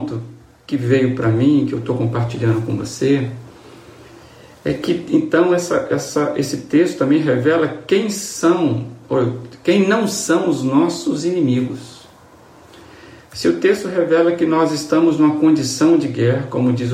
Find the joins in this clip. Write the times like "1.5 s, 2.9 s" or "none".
none